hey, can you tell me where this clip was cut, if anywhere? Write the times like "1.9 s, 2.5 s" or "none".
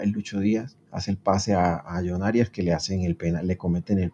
none